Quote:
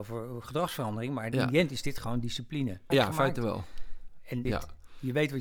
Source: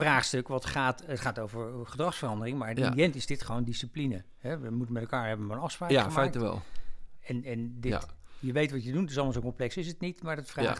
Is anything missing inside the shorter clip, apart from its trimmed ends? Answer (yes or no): yes